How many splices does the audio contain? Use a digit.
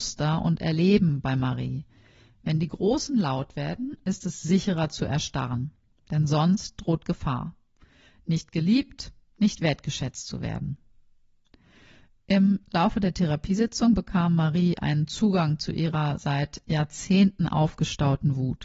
0